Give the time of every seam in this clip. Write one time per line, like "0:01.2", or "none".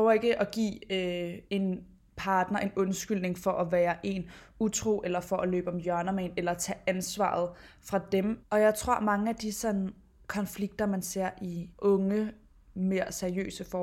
0:01.5
0:08.4
0:11.7